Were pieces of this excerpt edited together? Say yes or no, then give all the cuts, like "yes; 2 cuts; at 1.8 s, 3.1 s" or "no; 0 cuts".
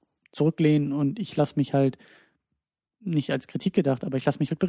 no; 0 cuts